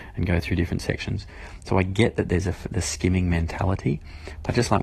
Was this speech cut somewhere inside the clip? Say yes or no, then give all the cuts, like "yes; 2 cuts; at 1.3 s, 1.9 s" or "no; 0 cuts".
no; 0 cuts